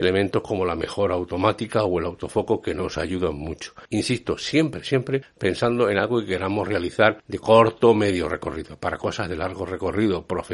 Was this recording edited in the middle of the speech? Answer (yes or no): no